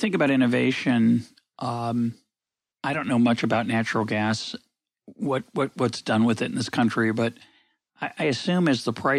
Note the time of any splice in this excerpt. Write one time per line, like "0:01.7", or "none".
none